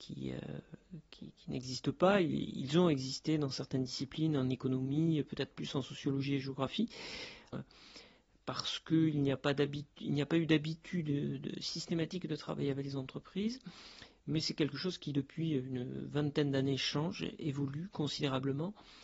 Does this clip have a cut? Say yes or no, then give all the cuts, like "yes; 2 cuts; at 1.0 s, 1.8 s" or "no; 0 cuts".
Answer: yes; 1 cut; at 7.5 s